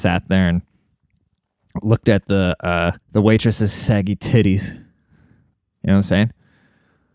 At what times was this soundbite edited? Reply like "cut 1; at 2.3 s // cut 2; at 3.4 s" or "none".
cut 1; at 3.0 s